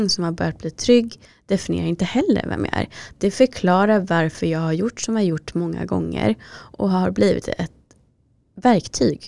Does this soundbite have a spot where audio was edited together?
no; 0 cuts

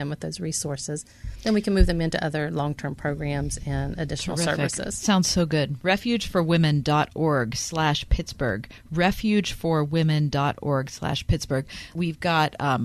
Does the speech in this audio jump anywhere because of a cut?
no; 0 cuts

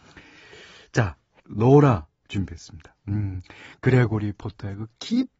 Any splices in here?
yes; 2 cuts; at 1.4 s, 3.0 s

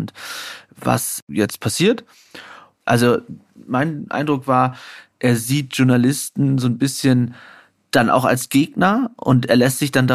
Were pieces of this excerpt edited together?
yes; 1 cut; at 2.7 s

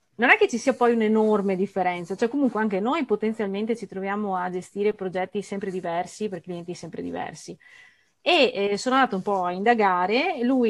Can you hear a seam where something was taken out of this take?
no; 0 cuts

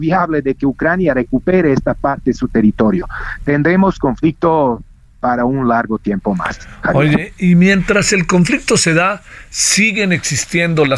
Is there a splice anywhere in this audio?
no; 0 cuts

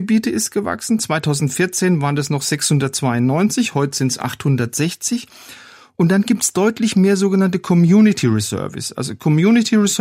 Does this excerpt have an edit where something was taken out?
no; 0 cuts

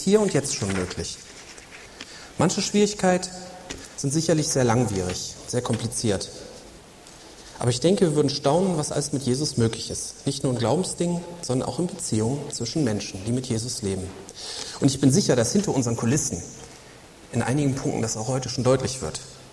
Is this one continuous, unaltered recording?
yes; 0 cuts

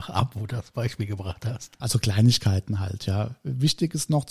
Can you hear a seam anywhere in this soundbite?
yes; 1 cut; at 1.8 s

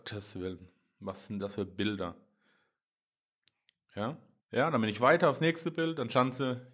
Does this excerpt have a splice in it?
yes; 1 cut; at 4.4 s

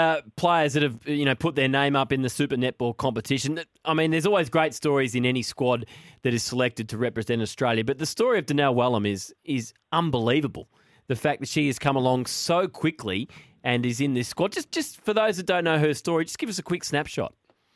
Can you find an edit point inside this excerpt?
no; 0 cuts

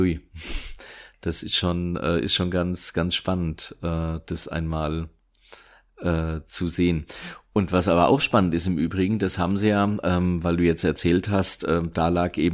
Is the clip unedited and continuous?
yes; 0 cuts

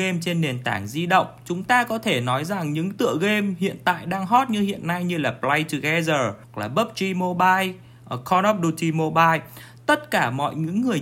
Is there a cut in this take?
yes; 1 cut; at 6.4 s

